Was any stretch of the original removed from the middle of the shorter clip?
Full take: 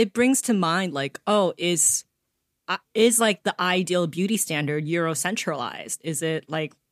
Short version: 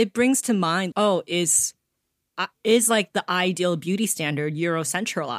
yes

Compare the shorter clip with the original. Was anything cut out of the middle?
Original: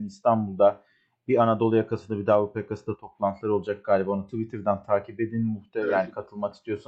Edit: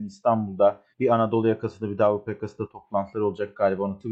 yes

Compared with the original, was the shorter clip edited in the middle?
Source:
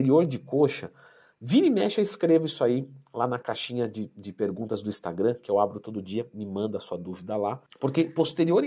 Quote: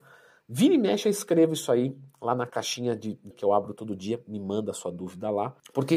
yes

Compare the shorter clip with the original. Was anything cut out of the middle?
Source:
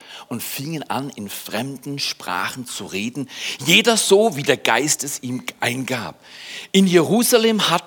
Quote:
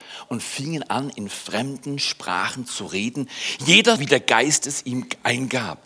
yes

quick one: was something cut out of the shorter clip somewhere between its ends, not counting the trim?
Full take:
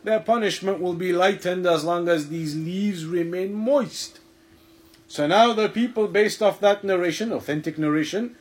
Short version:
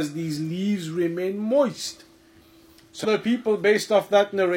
yes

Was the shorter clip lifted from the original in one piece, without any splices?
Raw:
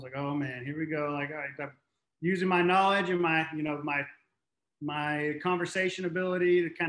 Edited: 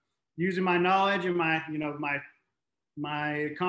yes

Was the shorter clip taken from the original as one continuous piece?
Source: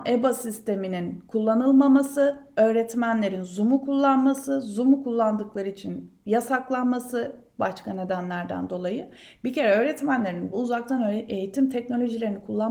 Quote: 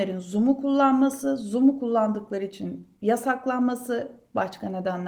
yes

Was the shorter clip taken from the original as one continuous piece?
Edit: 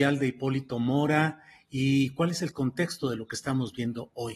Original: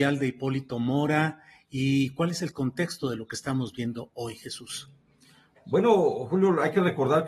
yes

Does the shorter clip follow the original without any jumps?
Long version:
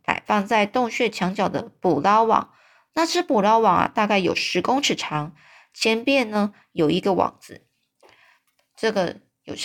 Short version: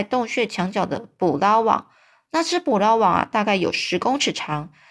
yes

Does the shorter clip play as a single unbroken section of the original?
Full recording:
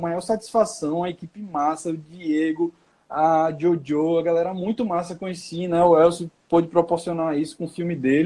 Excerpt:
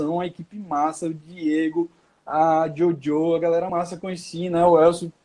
no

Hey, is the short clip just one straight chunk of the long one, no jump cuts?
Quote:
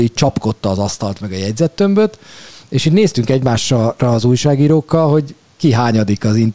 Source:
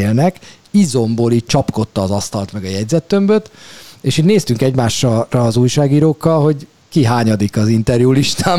yes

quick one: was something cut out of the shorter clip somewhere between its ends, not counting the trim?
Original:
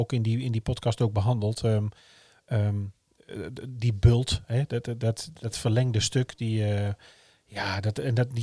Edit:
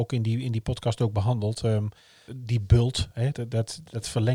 yes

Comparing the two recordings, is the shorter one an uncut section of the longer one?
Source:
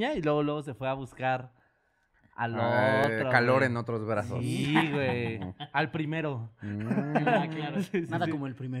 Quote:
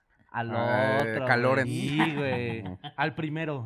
no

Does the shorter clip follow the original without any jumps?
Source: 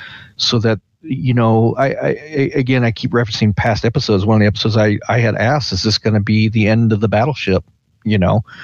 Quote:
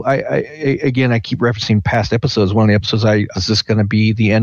no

